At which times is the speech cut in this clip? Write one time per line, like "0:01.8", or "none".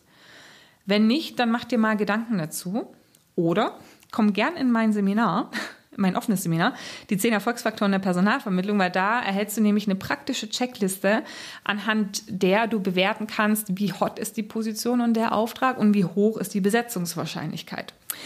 none